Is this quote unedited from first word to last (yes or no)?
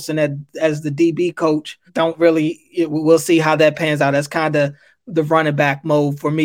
no